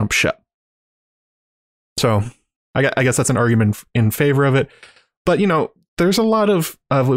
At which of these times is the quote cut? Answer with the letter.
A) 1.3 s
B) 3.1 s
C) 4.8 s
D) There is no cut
D